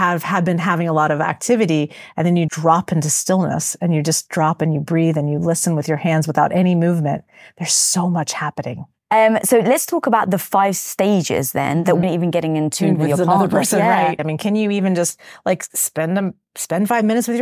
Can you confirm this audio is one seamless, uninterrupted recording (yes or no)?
no